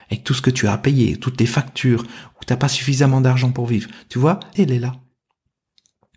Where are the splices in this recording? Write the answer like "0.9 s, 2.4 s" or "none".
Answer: 4.6 s